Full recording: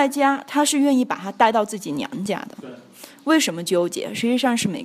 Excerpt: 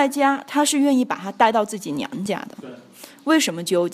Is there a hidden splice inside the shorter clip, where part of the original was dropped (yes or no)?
no